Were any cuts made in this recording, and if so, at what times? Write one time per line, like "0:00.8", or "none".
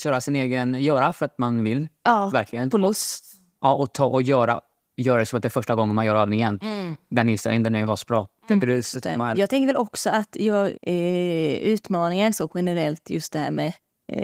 0:09.3
0:10.7